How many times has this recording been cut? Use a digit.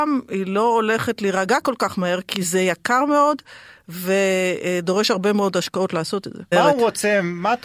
1